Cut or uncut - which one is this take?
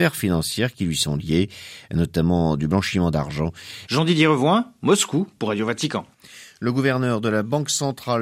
cut